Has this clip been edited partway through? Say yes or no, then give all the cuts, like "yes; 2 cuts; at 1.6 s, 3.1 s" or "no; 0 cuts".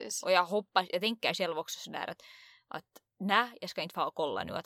yes; 1 cut; at 3.1 s